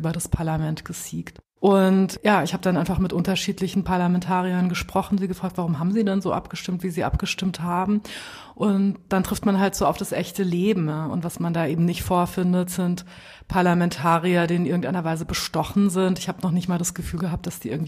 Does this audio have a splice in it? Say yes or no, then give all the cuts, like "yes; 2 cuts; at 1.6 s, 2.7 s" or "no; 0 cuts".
no; 0 cuts